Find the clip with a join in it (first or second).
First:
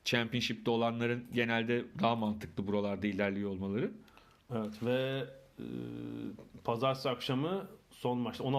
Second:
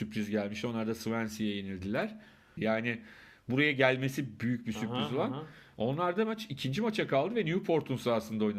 second